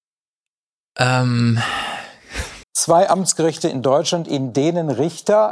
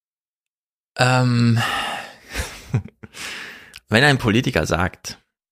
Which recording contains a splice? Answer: first; 1 cut; at 2.6 s

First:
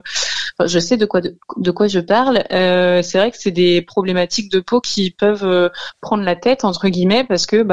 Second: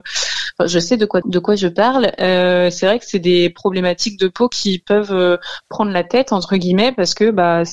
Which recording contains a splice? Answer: second; 1 cut; at 1.2 s

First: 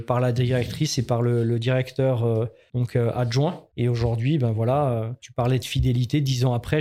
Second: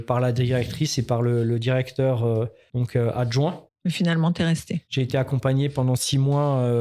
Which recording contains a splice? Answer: second; 2 cuts; at 3.7 s, 4.9 s

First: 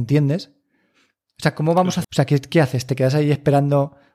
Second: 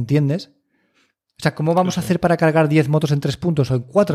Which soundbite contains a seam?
first; 1 cut; at 2.0 s

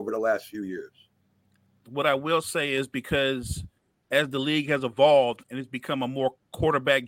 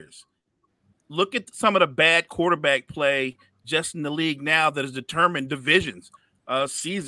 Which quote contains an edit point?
first; 1 cut; at 1.8 s

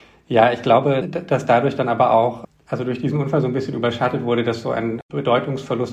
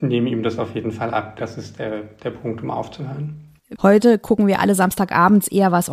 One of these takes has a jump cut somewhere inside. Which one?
second; 2 cuts; at 1.4 s, 3.8 s

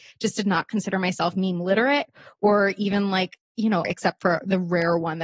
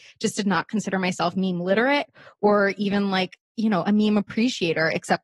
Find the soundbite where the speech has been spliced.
first; 1 cut; at 3.8 s

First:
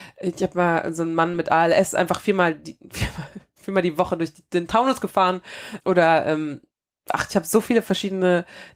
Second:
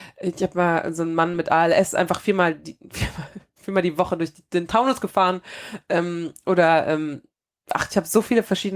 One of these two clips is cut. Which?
first; 1 cut; at 5.8 s

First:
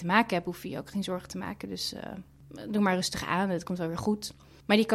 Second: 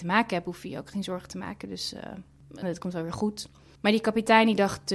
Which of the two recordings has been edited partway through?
second; 1 cut; at 2.6 s

